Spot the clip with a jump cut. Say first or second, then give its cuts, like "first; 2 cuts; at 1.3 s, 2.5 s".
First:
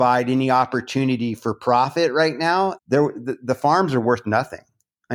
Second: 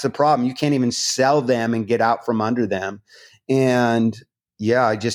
first; 1 cut; at 2.8 s